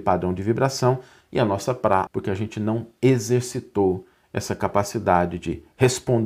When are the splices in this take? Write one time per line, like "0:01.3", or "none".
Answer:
0:02.1